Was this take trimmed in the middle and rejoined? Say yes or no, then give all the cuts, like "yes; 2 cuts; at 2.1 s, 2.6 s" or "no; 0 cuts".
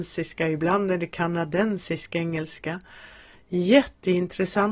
no; 0 cuts